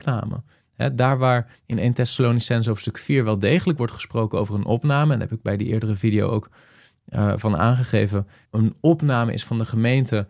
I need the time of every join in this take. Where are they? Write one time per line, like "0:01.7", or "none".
0:08.4